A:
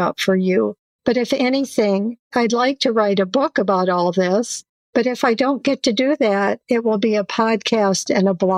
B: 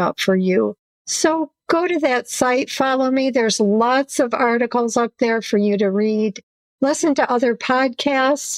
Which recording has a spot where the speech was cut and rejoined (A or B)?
B